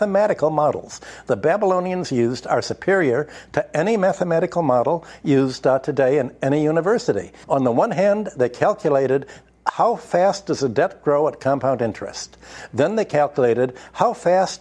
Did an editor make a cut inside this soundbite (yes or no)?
yes